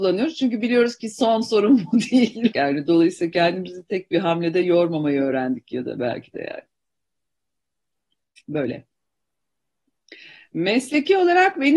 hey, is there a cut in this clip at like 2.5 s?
yes; 1 cut; at 2.5 s

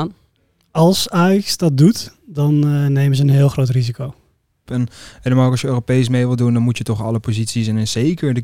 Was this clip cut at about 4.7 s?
yes; 1 cut; at 4.7 s

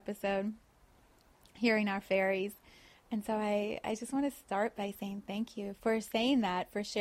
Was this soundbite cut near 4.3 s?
no; 2 cuts; at 2.9 s, 5.8 s

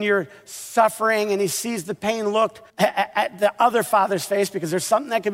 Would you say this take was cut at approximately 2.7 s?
yes; 1 cut; at 2.7 s

